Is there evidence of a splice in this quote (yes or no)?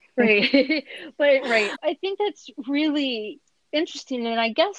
yes